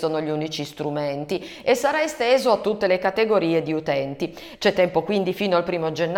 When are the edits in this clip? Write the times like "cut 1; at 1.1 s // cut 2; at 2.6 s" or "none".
cut 1; at 4.6 s